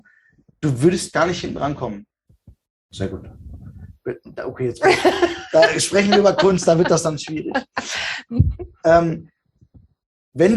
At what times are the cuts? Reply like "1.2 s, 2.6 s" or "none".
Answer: 2.7 s